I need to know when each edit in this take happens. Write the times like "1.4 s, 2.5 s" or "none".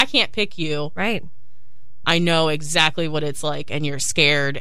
2.0 s